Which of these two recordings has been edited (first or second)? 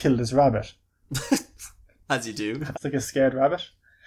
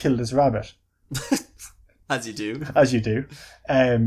first